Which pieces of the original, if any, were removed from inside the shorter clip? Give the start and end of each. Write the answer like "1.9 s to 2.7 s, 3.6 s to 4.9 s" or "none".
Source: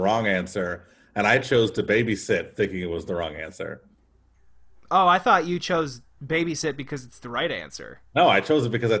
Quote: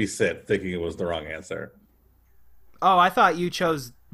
none

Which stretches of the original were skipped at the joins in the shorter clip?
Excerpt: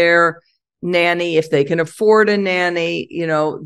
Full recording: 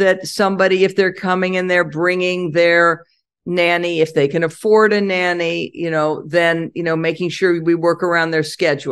none

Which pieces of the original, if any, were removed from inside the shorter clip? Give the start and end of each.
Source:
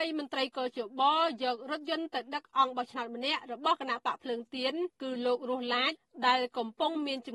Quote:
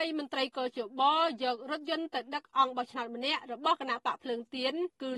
none

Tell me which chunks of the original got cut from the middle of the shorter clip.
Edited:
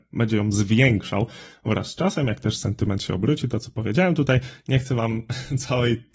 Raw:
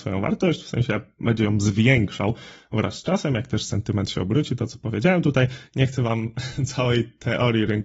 none

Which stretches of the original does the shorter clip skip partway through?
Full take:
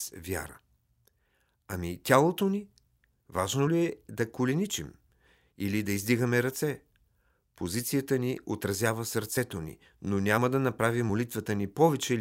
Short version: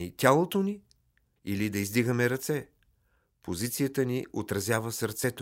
3.2 s to 5.5 s

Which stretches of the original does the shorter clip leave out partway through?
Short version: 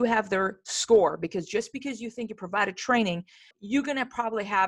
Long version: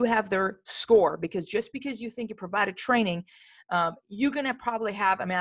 3.5 s to 4.0 s

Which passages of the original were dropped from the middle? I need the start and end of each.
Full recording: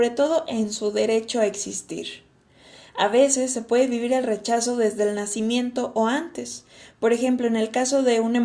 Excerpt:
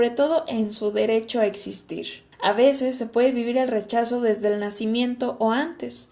2.3 s to 2.9 s

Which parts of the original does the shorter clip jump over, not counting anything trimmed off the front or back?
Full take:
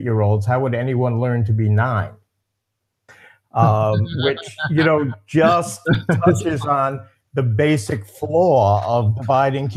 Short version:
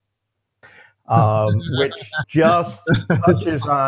4.7 s to 5.2 s

